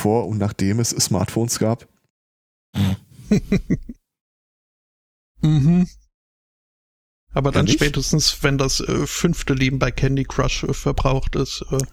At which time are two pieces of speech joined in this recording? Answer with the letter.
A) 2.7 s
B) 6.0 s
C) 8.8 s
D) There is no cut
A